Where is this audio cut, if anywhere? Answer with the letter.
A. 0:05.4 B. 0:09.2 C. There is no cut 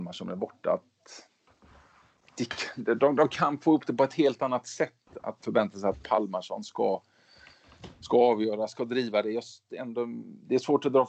A